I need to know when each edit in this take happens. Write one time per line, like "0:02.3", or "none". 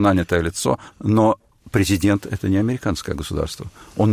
0:00.9